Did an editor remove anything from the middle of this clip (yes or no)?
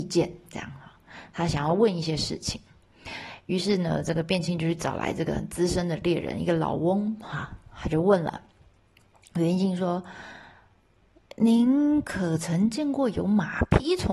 no